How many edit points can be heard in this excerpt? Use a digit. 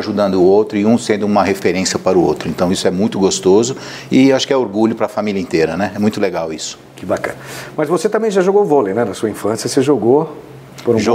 0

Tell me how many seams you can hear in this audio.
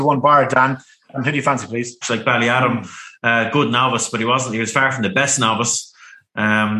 1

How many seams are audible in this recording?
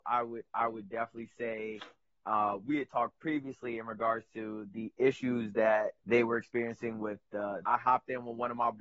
2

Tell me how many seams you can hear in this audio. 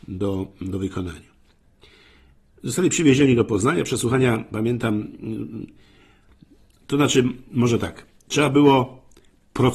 0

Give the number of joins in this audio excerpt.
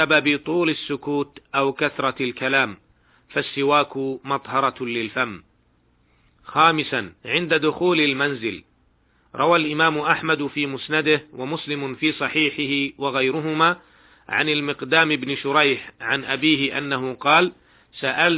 1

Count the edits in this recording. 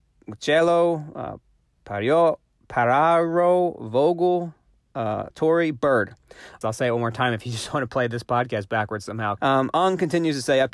3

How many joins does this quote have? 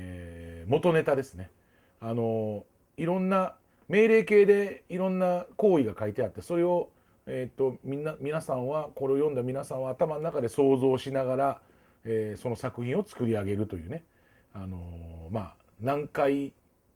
0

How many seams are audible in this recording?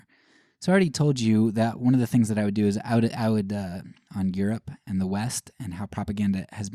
1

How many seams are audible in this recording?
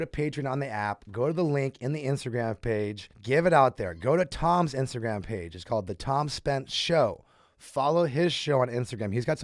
1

